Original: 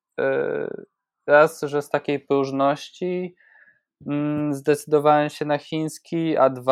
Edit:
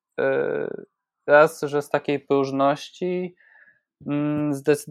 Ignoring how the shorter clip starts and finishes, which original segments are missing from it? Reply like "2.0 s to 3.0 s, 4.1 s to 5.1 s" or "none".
none